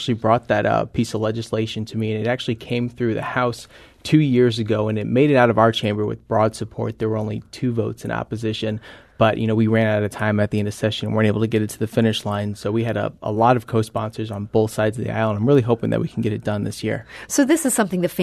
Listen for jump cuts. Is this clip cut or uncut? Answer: uncut